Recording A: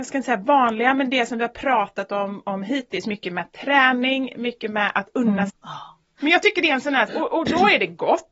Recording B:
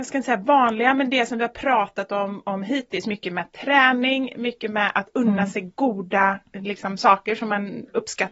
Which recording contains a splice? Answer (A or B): A